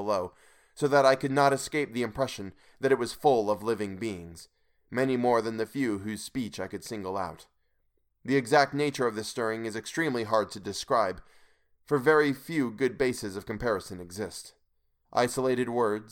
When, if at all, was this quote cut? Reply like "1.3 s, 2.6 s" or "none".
15.0 s